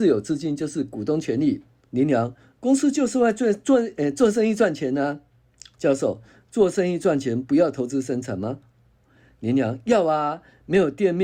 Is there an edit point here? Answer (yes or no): yes